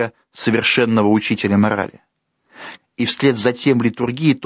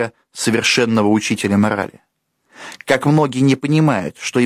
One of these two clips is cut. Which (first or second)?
first